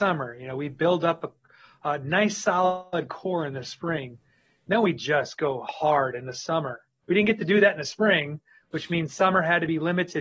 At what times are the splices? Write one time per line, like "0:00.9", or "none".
0:07.0